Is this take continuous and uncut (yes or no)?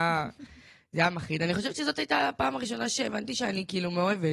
yes